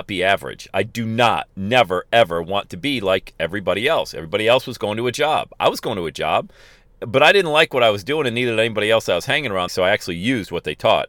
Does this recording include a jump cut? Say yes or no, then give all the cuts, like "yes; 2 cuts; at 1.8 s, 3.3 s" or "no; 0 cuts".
yes; 1 cut; at 9.7 s